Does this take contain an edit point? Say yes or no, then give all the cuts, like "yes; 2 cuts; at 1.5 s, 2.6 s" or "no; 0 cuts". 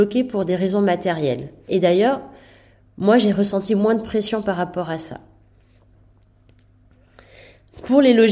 yes; 1 cut; at 1.7 s